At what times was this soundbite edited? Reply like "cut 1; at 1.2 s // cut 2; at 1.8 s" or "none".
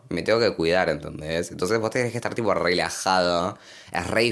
none